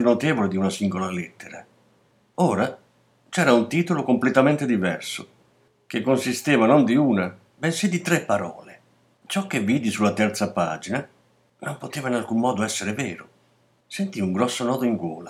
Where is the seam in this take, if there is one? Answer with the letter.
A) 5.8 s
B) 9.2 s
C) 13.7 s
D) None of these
B